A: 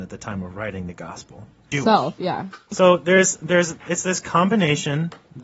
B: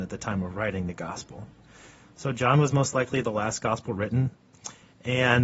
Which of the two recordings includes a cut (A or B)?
A